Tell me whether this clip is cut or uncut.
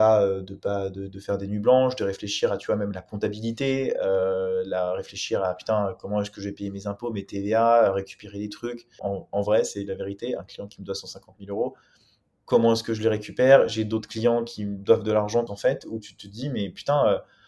cut